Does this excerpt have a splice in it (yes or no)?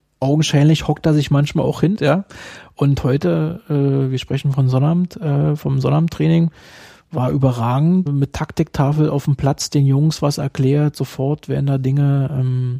yes